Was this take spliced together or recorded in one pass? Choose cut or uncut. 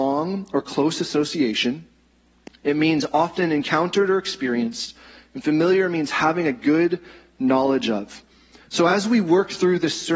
uncut